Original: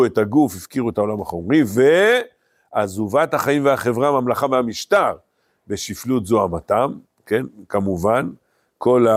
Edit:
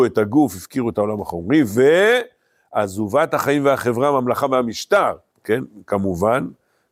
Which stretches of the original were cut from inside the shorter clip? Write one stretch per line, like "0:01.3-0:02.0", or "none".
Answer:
0:05.3-0:07.1